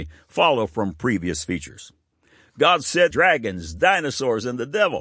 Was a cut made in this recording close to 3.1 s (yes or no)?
yes